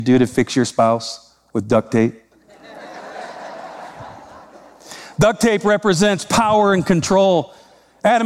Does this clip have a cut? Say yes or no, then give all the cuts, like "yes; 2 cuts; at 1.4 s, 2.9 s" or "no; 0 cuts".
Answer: no; 0 cuts